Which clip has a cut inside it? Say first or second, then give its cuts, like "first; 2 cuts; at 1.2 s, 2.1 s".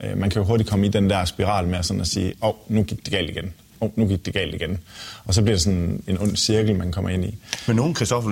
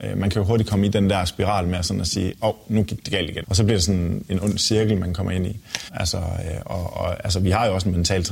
second; 2 cuts; at 3.4 s, 5.9 s